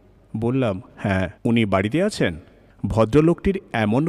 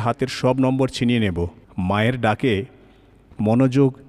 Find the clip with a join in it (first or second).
first